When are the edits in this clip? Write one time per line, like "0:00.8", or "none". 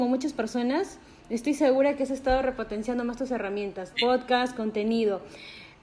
0:03.9